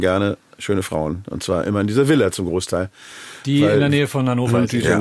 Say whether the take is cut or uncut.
uncut